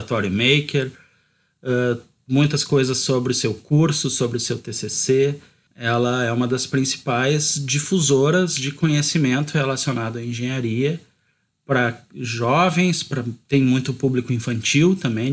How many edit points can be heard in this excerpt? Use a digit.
1